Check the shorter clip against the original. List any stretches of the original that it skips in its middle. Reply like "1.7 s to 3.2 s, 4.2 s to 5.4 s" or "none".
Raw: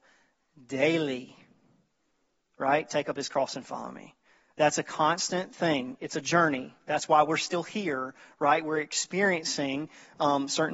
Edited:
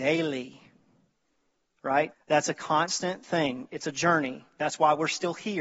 2.9 s to 4.4 s